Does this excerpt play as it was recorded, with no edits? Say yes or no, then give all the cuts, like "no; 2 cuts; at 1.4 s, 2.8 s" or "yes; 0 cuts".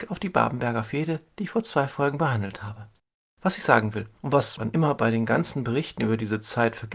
yes; 0 cuts